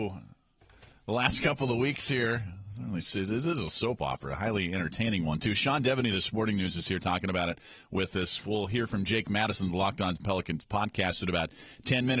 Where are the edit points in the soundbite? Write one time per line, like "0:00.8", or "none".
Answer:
none